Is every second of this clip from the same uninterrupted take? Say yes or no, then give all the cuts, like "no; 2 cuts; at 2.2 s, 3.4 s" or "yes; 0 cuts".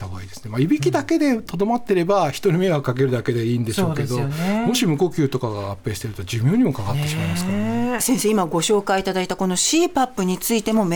yes; 0 cuts